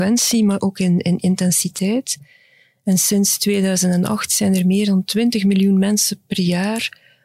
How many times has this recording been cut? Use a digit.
0